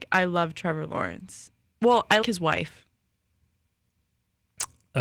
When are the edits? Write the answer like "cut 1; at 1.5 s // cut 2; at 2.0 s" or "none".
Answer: cut 1; at 2.2 s